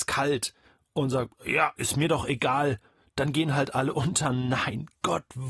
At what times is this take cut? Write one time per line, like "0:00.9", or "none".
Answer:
none